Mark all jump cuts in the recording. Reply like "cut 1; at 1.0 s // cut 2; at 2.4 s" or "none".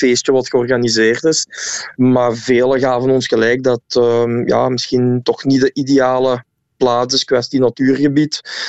none